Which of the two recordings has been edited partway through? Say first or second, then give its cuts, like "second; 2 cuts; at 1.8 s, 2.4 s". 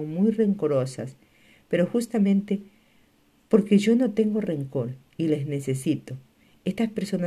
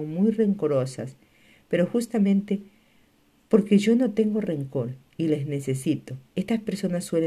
second; 1 cut; at 6.3 s